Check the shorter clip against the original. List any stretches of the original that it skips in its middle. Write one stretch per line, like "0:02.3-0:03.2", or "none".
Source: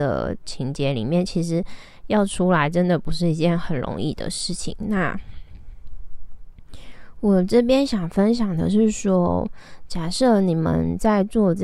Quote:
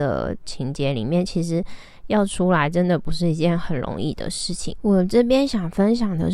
0:04.8-0:07.2